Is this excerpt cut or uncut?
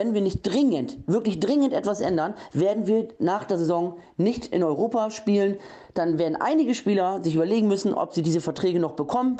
uncut